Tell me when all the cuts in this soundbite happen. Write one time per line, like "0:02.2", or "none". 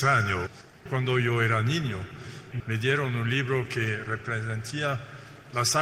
0:02.6